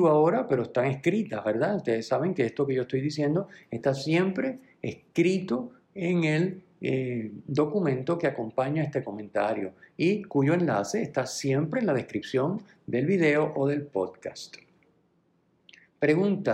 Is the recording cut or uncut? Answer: uncut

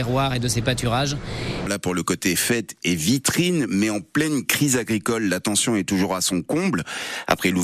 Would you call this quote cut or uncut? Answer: cut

